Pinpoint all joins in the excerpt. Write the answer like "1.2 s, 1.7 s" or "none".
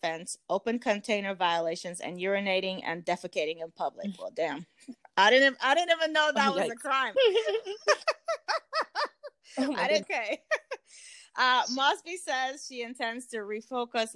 7.1 s, 10.0 s